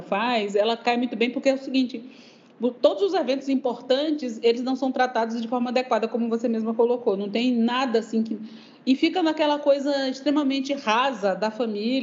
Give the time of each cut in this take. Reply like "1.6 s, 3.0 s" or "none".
none